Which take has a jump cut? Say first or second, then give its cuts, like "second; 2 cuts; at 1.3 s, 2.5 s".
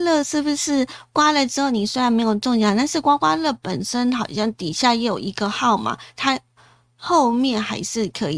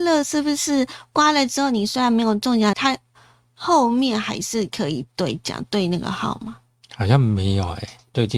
second; 1 cut; at 2.7 s